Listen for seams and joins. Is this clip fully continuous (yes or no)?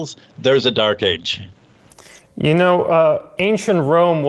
yes